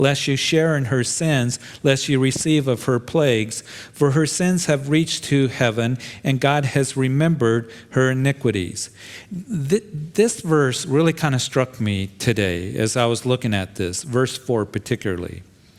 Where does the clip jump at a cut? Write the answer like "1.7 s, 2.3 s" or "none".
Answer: none

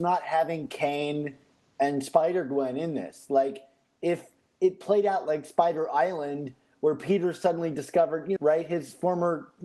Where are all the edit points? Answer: 8.4 s

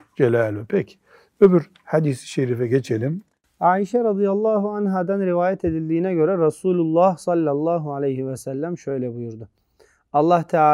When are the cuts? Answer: none

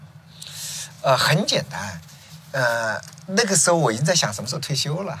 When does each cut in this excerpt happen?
none

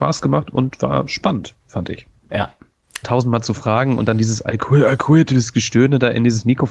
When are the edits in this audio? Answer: 3.0 s

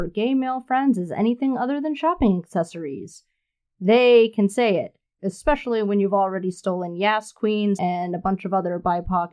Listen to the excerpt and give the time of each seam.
5.2 s, 7.8 s

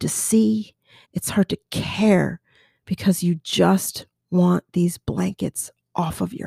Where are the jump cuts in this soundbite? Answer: 1.0 s

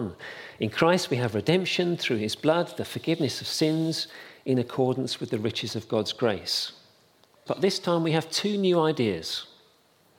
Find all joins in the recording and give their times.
7.5 s

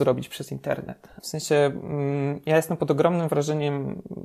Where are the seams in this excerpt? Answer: 1.2 s

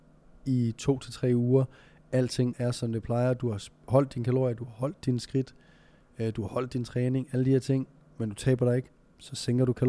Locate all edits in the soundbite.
2.5 s

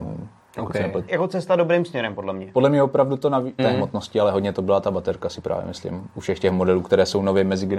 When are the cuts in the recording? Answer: 1.1 s, 3.6 s

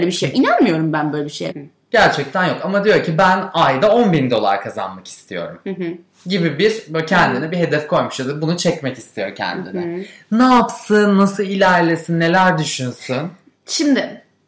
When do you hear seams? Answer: 1.5 s

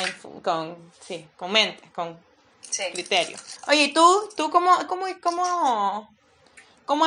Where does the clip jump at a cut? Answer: 3.6 s, 4.9 s

